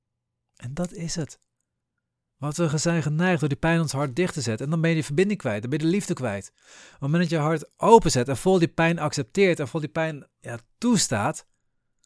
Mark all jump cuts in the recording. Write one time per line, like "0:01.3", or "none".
none